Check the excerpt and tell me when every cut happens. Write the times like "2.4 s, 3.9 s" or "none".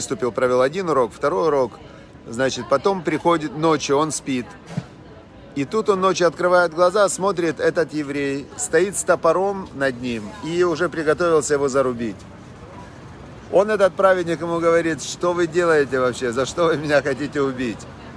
8.5 s